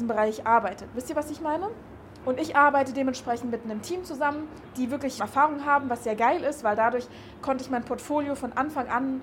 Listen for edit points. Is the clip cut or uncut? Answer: cut